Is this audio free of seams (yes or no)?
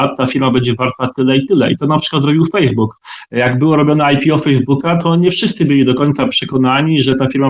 yes